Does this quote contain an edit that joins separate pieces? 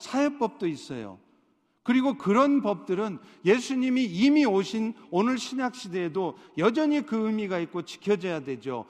no; 0 cuts

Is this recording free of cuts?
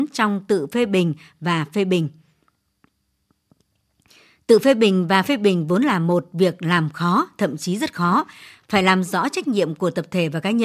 yes; 0 cuts

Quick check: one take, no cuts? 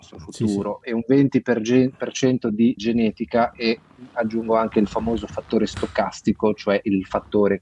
no; 1 cut; at 2.8 s

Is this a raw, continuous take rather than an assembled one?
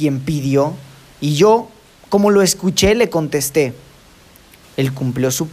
no; 1 cut; at 4.6 s

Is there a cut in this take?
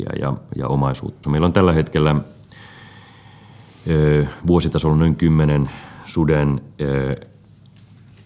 yes; 1 cut; at 1.2 s

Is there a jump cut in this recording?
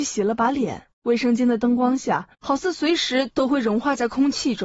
yes; 2 cuts; at 0.9 s, 2.3 s

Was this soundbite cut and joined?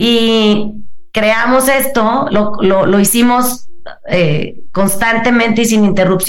no; 0 cuts

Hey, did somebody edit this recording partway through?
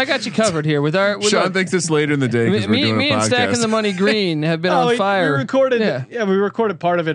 no; 0 cuts

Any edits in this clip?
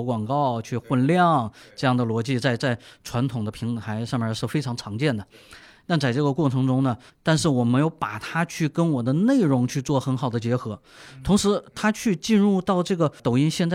yes; 1 cut; at 7.1 s

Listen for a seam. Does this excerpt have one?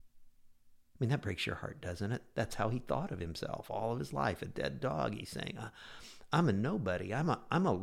no; 0 cuts

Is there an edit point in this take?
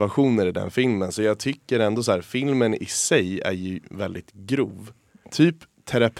yes; 1 cut; at 5.2 s

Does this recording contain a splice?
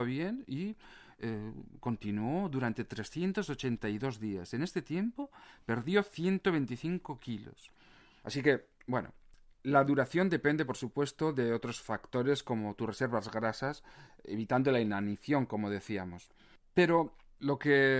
no; 0 cuts

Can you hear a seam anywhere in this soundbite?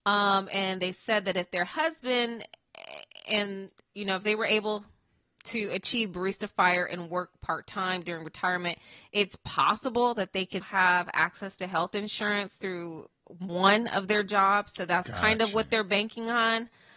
yes; 1 cut; at 10.6 s

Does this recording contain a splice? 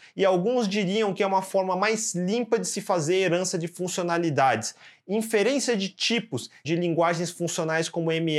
yes; 1 cut; at 6.6 s

